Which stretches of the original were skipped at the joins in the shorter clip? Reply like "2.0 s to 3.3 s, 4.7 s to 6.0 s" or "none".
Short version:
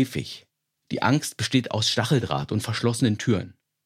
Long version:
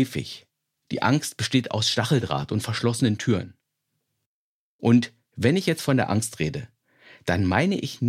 none